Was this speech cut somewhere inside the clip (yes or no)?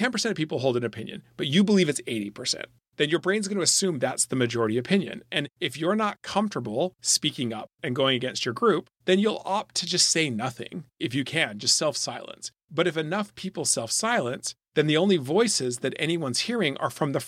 no